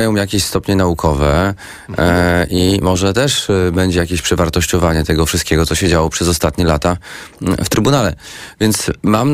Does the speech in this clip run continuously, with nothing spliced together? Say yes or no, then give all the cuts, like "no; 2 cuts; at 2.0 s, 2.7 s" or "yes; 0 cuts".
yes; 0 cuts